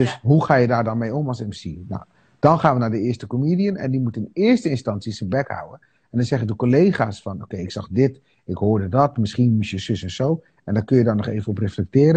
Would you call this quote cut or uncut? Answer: uncut